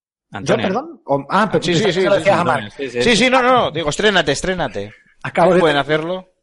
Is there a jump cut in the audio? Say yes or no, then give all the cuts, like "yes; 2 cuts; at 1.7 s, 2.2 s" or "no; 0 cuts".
no; 0 cuts